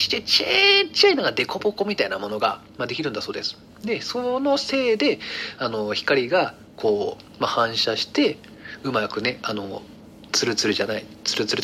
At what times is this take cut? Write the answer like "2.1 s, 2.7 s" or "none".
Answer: none